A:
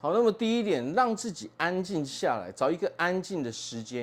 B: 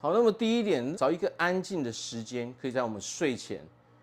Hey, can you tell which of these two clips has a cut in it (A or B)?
B